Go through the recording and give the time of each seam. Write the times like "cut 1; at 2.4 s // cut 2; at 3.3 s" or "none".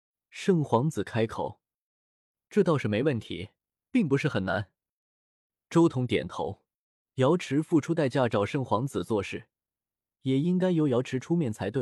cut 1; at 7.0 s // cut 2; at 10.1 s